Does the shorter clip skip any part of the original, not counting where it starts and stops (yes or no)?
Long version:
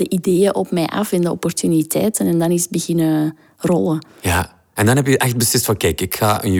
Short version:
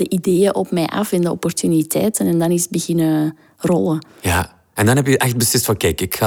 no